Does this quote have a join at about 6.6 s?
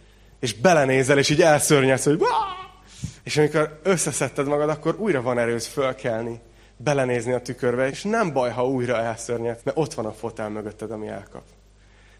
no; 3 cuts; at 3.2 s, 7.9 s, 9.6 s

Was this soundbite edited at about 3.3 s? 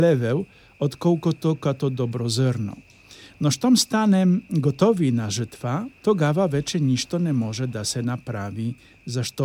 no; 1 cut; at 6.0 s

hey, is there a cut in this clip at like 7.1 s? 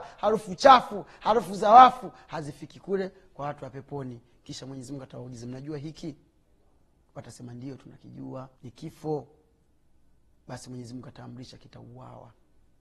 no; 1 cut; at 8.6 s

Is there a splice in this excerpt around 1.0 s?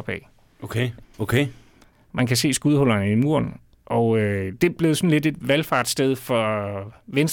yes; 1 cut; at 1.0 s

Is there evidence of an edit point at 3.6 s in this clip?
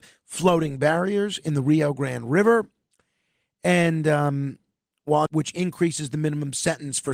no; 1 cut; at 5.3 s

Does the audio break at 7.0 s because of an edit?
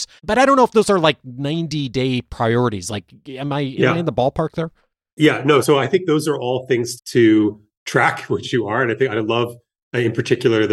yes; 2 cuts; at 5.6 s, 7.0 s

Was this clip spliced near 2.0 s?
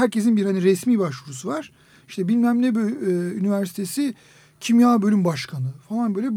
yes; 1 cut; at 2.0 s

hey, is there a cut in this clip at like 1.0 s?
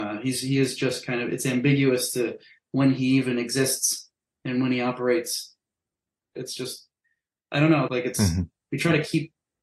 no; 2 cuts; at 6.4 s, 7.9 s

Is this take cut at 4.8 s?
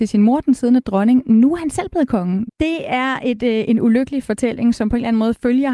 no; 1 cut; at 2.5 s

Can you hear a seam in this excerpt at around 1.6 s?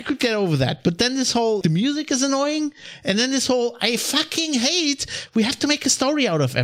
yes; 1 cut; at 1.6 s

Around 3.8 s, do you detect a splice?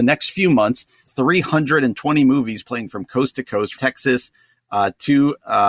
yes; 2 cuts; at 1.1 s, 3.8 s

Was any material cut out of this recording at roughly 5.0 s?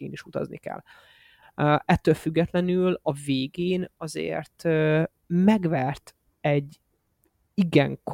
no; 1 cut; at 1.4 s

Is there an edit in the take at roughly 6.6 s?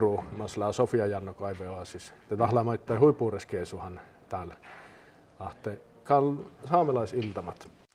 yes; 1 cut; at 6.6 s

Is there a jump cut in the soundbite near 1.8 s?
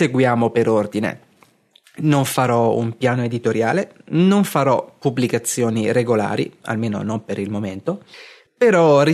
no; 0 cuts

